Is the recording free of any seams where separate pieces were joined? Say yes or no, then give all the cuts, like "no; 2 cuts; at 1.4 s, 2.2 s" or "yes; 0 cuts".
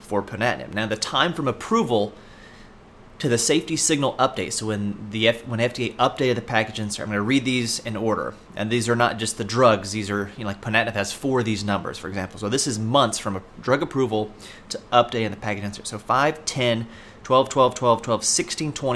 yes; 0 cuts